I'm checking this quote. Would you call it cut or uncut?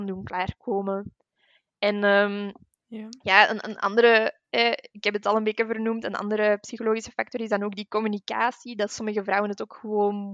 uncut